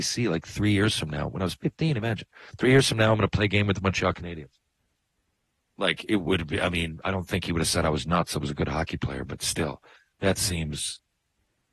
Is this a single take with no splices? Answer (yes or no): yes